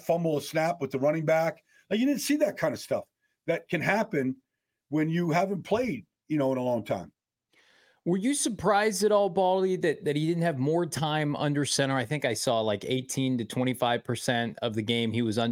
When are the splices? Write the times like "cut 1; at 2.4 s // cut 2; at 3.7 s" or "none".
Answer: none

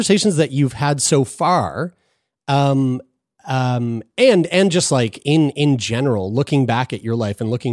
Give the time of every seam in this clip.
none

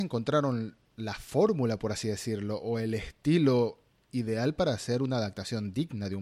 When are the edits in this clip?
none

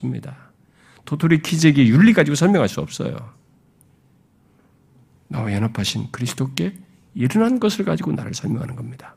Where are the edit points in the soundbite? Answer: none

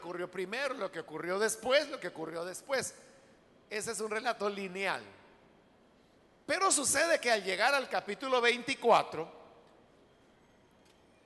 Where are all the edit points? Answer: none

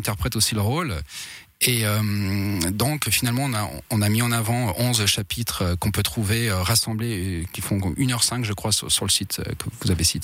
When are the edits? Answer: none

